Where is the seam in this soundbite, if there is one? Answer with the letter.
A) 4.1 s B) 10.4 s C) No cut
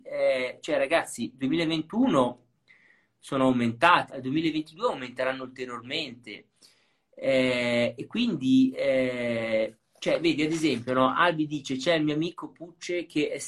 A